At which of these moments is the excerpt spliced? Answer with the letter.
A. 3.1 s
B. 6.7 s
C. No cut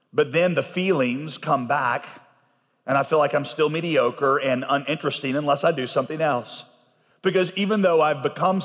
C